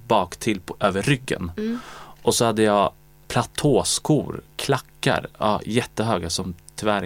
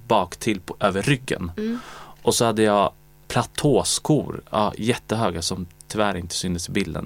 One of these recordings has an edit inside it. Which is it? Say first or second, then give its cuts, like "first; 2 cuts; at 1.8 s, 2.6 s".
second; 1 cut; at 4.4 s